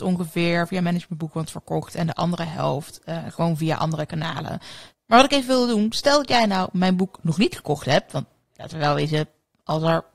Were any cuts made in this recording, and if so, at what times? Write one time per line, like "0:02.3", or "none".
0:04.9